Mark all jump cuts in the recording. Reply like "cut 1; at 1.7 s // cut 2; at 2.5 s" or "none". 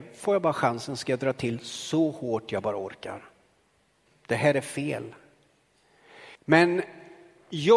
cut 1; at 4.1 s // cut 2; at 6.4 s